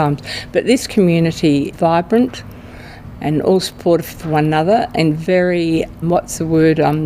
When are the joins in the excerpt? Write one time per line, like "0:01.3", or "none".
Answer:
0:01.7
0:06.0